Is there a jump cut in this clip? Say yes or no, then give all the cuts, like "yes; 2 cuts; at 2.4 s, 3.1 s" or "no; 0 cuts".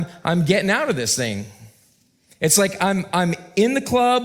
no; 0 cuts